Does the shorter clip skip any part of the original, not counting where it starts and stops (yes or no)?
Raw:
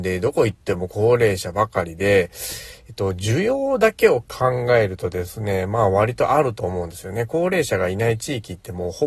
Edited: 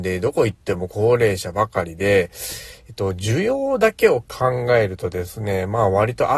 no